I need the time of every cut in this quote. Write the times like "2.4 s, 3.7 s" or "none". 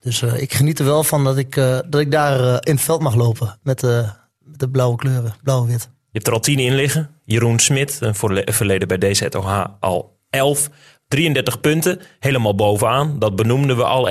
none

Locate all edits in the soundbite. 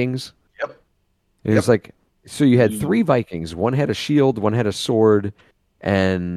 none

